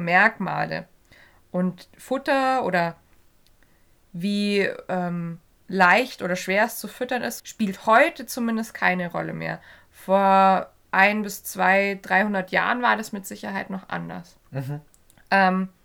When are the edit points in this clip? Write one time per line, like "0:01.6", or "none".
0:07.4